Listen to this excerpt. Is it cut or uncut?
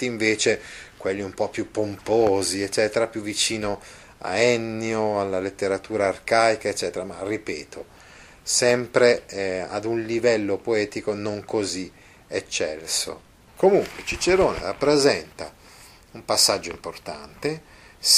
uncut